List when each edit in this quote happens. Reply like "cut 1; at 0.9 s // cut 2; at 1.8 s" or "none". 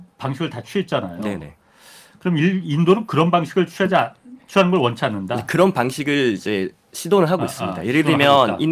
none